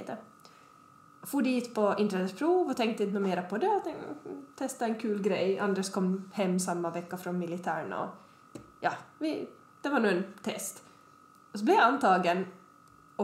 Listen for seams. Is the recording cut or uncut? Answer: uncut